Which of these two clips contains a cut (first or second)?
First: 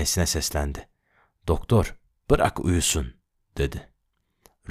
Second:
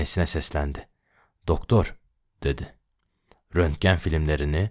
second